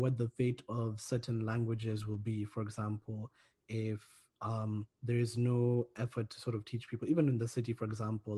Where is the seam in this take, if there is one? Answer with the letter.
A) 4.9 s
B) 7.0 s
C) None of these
A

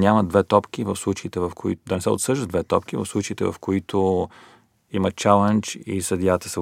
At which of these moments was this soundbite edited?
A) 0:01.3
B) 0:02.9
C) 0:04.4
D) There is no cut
D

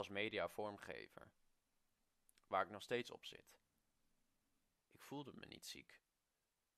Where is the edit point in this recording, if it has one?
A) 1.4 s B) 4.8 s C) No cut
B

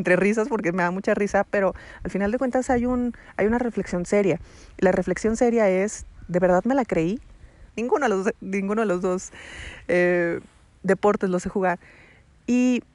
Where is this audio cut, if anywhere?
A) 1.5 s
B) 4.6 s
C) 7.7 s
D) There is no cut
C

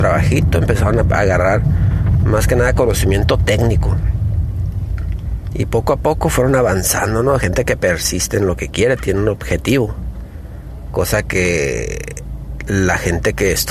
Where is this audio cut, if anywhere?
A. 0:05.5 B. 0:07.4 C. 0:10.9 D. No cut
D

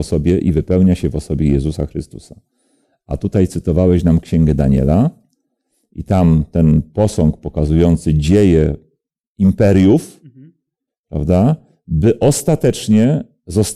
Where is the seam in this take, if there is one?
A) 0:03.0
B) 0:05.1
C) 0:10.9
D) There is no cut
C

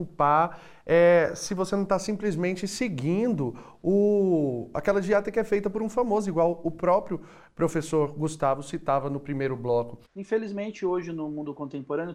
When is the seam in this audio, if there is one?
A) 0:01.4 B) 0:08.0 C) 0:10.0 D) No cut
C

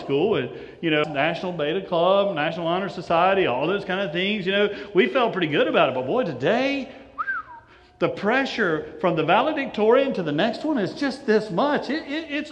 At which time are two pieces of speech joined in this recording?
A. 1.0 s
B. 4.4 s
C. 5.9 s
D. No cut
A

